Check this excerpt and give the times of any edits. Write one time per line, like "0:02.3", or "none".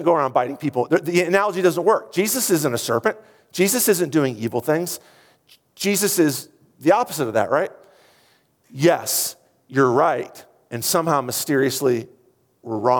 none